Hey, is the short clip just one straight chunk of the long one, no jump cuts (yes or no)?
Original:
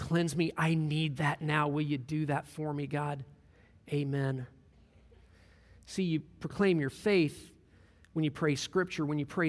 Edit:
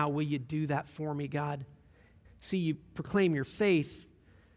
no